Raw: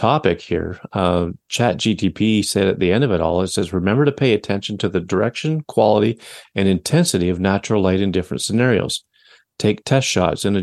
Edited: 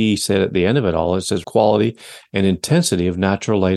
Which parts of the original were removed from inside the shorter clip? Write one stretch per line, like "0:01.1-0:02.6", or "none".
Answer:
0:03.7-0:05.7